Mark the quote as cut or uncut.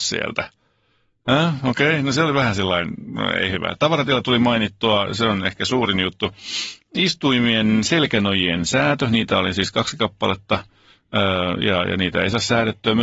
uncut